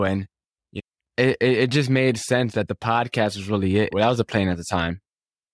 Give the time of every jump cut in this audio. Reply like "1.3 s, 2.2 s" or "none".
3.9 s